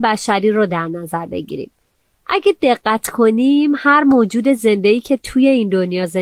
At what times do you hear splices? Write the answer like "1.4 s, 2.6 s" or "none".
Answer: none